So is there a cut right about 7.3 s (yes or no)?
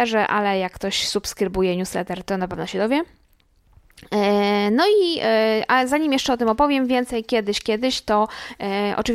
no